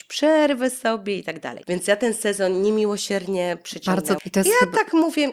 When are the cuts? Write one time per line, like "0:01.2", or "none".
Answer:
0:01.6
0:04.2